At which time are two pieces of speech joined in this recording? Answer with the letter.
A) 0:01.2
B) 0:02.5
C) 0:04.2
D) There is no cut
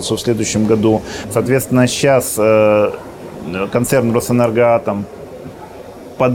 A